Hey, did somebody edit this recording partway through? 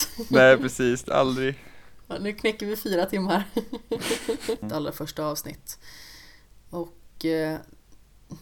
yes; 1 cut; at 4.6 s

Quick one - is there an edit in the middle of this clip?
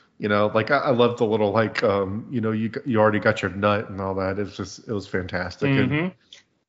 no; 0 cuts

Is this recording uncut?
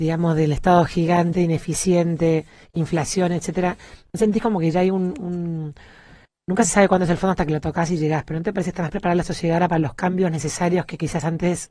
yes; 0 cuts

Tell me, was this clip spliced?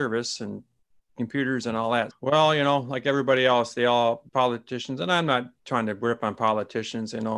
yes; 3 cuts; at 2.1 s, 4.3 s, 5.6 s

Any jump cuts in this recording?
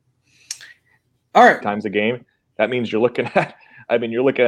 yes; 1 cut; at 1.6 s

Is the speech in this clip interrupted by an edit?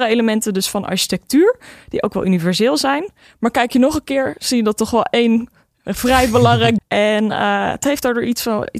yes; 1 cut; at 6.8 s

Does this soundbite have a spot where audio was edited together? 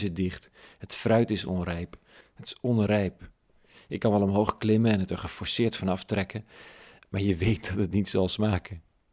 yes; 1 cut; at 2.2 s

